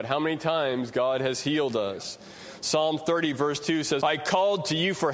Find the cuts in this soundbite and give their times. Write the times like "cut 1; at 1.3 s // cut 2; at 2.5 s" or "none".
cut 1; at 4.0 s